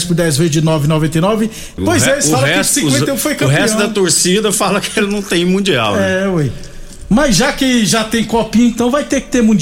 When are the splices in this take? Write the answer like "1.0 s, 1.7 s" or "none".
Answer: 1.8 s